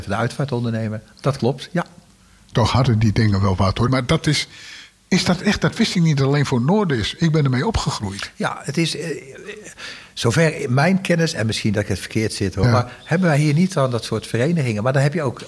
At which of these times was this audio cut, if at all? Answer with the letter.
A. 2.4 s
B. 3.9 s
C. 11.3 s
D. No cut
B